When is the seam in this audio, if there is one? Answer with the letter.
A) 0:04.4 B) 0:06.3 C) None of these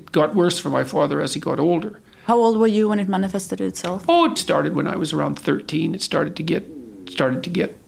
A